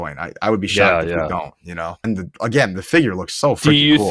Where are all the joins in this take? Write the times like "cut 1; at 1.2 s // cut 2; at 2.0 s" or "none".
cut 1; at 2.0 s